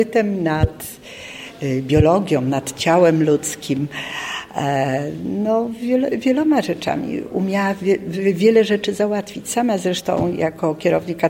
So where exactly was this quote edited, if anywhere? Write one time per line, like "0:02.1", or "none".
none

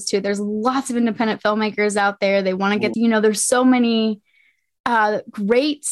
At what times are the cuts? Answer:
0:02.9

